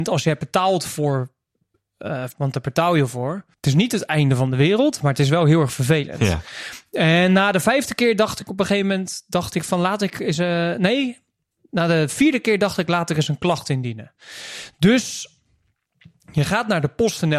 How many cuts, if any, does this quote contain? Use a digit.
1